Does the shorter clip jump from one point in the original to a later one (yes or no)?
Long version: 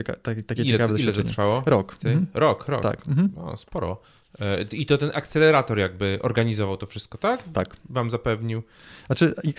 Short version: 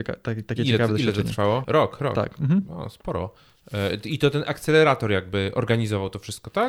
yes